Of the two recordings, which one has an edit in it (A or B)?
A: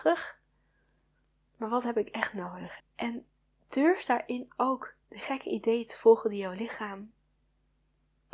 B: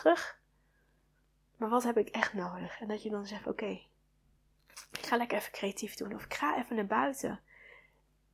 A